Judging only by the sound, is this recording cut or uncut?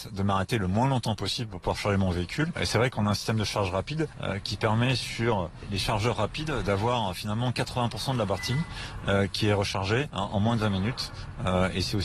uncut